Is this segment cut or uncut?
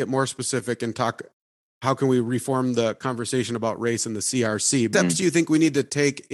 cut